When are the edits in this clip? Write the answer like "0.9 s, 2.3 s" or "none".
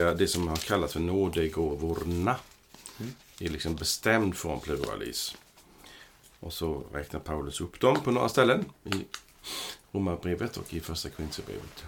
none